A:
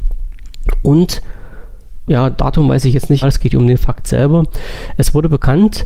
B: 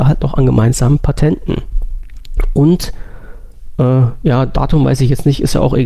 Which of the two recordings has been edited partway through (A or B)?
A